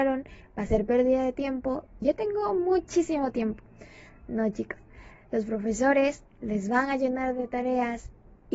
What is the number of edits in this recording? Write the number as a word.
one